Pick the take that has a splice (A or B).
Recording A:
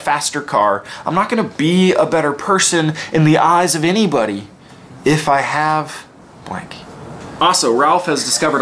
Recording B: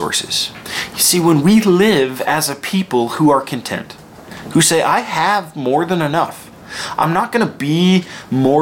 A